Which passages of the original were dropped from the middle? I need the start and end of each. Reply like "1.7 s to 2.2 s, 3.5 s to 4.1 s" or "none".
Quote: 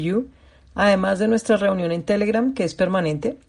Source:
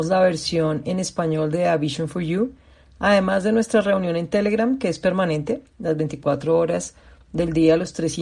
none